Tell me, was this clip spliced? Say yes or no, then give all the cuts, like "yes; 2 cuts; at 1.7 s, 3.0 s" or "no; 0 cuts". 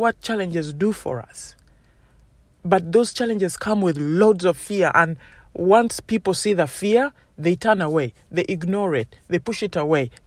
no; 0 cuts